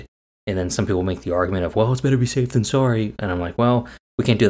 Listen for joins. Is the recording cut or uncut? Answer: uncut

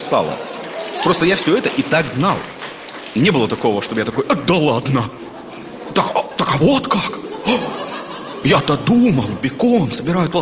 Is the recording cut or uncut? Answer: uncut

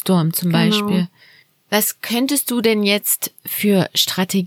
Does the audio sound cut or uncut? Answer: uncut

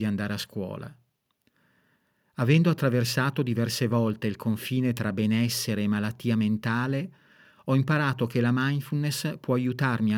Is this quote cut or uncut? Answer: uncut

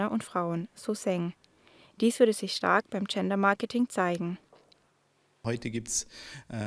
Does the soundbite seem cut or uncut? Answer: uncut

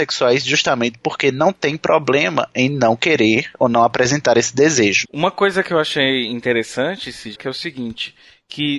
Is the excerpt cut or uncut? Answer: cut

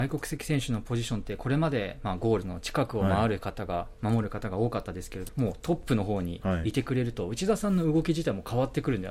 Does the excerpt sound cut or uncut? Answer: cut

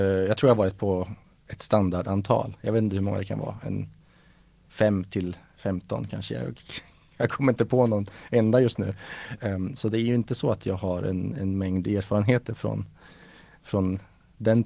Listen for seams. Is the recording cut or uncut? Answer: cut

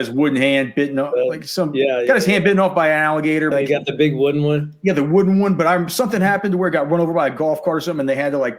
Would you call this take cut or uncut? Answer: cut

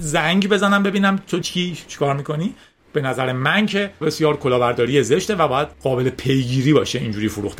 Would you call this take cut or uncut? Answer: cut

